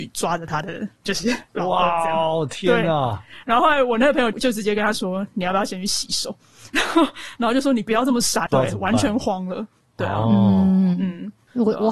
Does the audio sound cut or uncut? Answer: cut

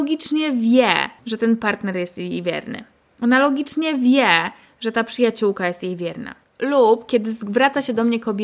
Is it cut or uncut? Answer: cut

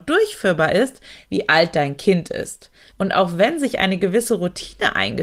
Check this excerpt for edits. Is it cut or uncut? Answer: cut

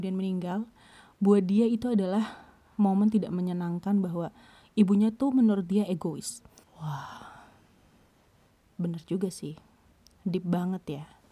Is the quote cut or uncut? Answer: cut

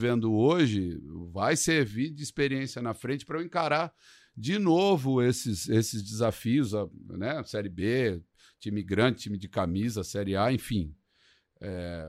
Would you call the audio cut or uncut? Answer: uncut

